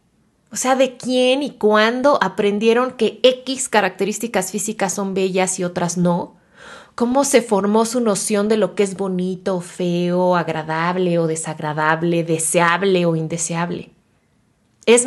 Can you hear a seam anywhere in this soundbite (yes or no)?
no